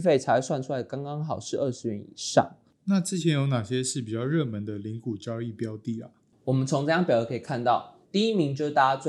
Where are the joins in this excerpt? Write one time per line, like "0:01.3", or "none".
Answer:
0:02.7
0:08.0